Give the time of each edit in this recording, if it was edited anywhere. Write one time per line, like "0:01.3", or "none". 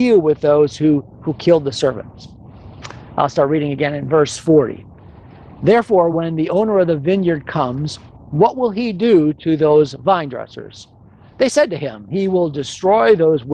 none